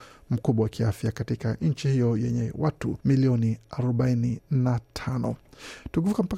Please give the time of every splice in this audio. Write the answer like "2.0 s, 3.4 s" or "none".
3.0 s